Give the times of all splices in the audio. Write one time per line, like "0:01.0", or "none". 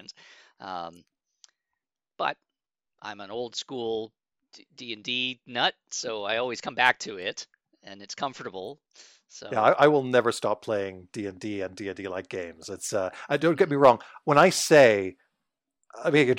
none